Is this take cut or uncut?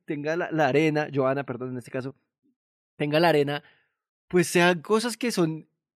uncut